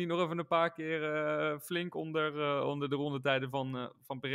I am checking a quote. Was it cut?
no; 0 cuts

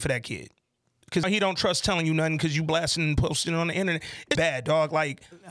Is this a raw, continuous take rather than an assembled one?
no; 2 cuts; at 1.2 s, 4.4 s

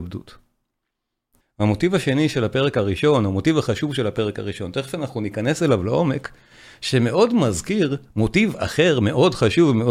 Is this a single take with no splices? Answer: no; 1 cut; at 1.4 s

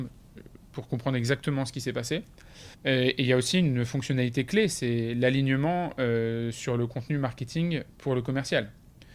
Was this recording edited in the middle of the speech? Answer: yes; 1 cut; at 2.7 s

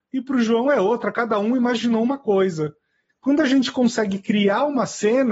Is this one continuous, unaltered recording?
no; 1 cut; at 3.1 s

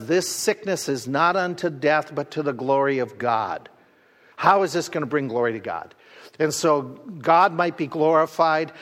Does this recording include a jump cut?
yes; 1 cut; at 4.3 s

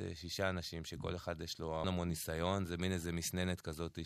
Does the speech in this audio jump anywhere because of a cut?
yes; 1 cut; at 1.8 s

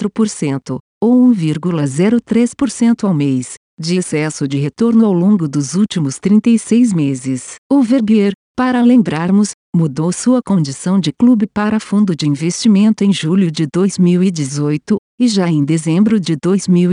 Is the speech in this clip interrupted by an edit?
yes; 1 cut; at 7.6 s

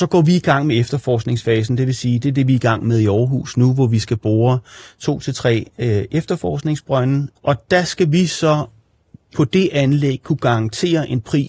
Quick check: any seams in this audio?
yes; 1 cut; at 7.4 s

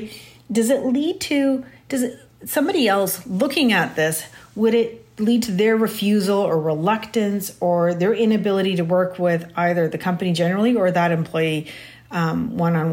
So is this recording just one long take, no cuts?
yes; 0 cuts

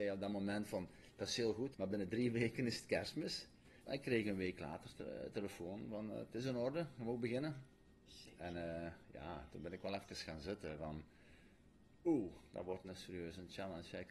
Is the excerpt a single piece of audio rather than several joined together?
no; 2 cuts; at 1.7 s, 3.8 s

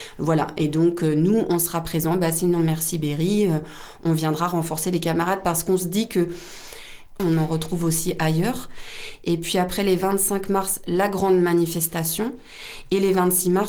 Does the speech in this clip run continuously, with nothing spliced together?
no; 1 cut; at 7.2 s

